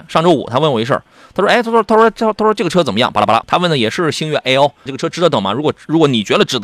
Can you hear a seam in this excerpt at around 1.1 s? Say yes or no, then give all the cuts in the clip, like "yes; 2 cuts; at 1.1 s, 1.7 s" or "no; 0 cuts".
no; 2 cuts; at 3.4 s, 4.9 s